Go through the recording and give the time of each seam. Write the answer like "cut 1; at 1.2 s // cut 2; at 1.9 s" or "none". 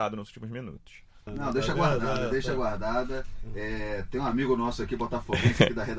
cut 1; at 1.3 s